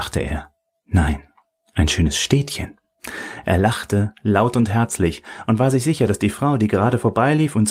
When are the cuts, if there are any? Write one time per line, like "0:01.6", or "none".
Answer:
none